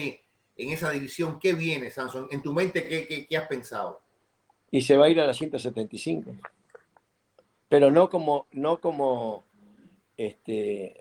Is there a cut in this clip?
no; 0 cuts

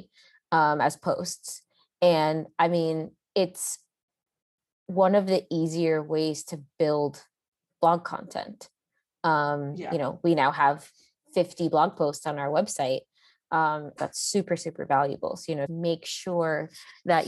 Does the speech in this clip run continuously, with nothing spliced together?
no; 2 cuts; at 14.0 s, 15.7 s

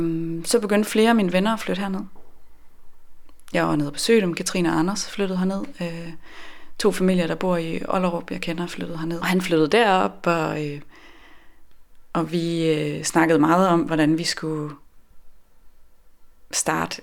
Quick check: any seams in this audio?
yes; 1 cut; at 9.2 s

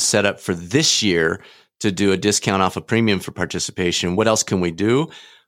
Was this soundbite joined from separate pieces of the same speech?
no; 0 cuts

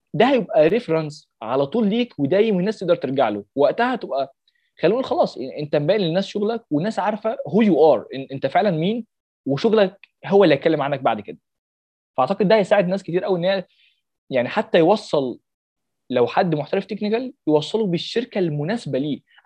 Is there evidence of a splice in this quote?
no; 0 cuts

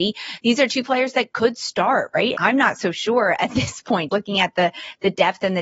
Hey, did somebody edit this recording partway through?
yes; 2 cuts; at 2.3 s, 4.1 s

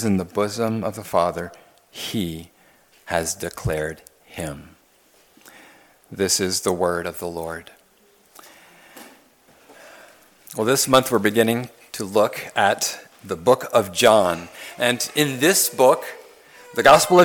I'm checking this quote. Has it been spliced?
no; 0 cuts

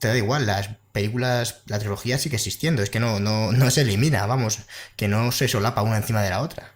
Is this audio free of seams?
yes; 0 cuts

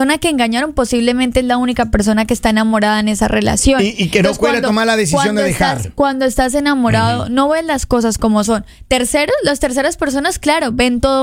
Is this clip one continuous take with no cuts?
yes; 0 cuts

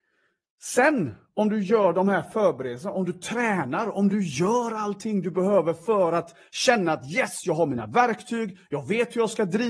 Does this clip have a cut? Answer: no; 0 cuts

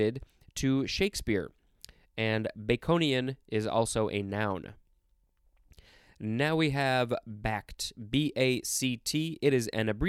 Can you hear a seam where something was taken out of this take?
no; 0 cuts

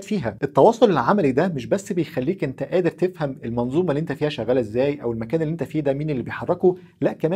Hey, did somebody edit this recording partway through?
no; 0 cuts

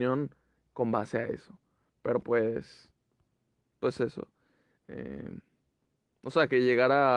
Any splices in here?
yes; 1 cut; at 4.8 s

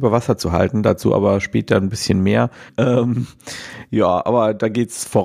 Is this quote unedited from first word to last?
no; 1 cut; at 2.7 s

